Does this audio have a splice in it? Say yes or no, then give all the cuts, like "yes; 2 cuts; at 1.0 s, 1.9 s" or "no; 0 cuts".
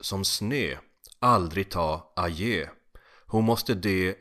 no; 0 cuts